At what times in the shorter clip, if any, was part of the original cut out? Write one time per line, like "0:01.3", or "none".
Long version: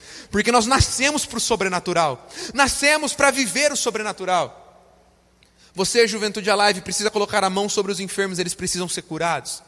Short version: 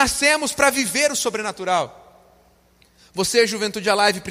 none